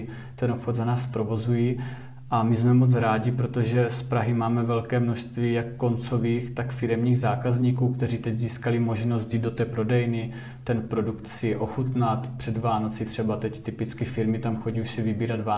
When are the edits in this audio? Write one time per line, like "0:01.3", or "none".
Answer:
none